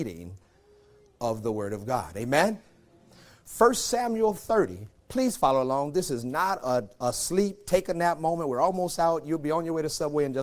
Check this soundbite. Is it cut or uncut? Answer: uncut